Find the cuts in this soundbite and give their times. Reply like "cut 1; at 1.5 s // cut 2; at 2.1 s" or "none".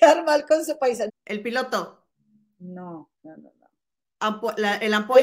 cut 1; at 1.1 s // cut 2; at 3.1 s